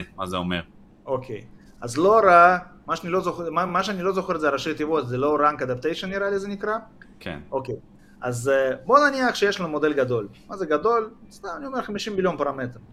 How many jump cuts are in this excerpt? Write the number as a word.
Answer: zero